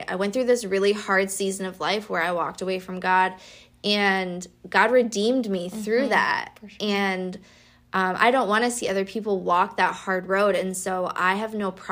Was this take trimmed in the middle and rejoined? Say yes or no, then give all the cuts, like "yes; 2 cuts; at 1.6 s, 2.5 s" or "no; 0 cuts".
no; 0 cuts